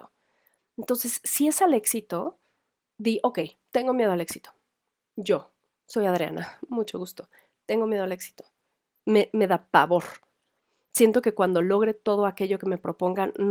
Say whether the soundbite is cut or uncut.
uncut